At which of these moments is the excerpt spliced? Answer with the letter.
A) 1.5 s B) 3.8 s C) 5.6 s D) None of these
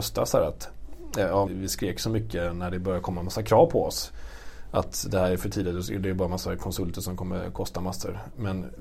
A